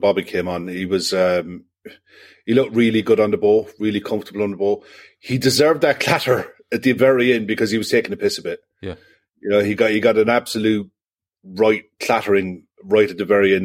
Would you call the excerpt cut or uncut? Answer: uncut